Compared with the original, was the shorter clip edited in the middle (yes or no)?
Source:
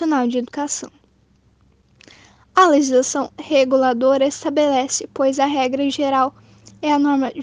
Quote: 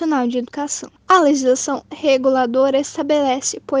yes